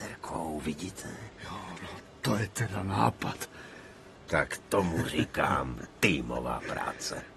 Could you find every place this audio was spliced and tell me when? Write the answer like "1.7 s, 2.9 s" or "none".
1.7 s, 4.1 s